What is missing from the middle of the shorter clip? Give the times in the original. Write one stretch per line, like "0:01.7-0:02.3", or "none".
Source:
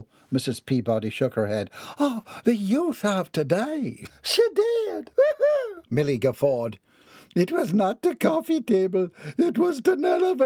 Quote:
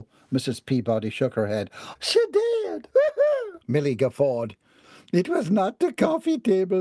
0:02.0-0:04.2